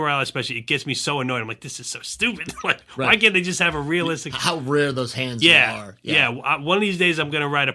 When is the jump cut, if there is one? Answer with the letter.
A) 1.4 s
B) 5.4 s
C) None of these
B